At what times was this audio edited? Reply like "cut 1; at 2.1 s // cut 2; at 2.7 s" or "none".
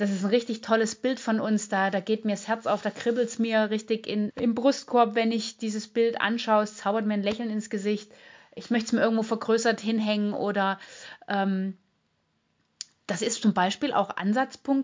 cut 1; at 4.3 s